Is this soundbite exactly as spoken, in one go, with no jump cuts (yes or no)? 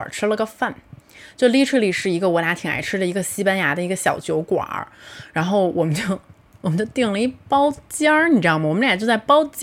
yes